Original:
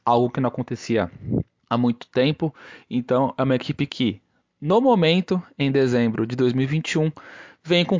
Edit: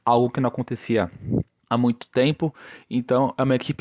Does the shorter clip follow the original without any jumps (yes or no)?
yes